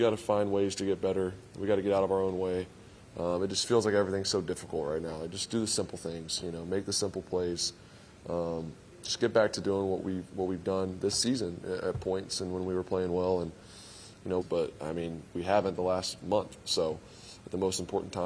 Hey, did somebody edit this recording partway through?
yes; 1 cut; at 14.4 s

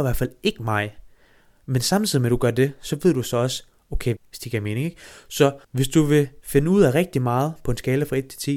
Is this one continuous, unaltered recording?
no; 2 cuts; at 4.2 s, 5.6 s

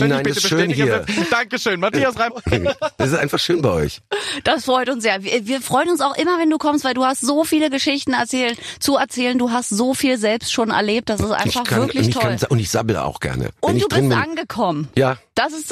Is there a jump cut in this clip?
no; 0 cuts

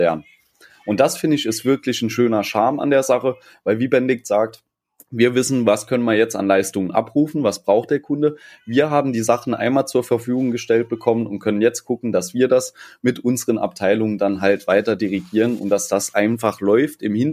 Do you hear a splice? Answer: no; 0 cuts

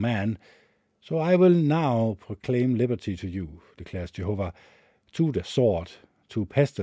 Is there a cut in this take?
no; 0 cuts

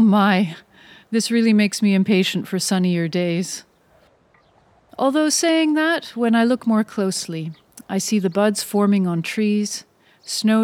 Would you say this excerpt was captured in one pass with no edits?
yes; 0 cuts

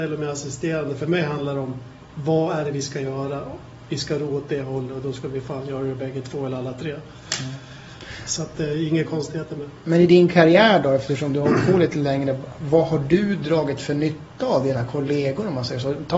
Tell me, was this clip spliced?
no; 0 cuts

